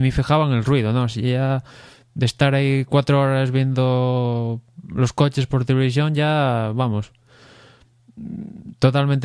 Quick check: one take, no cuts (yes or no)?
yes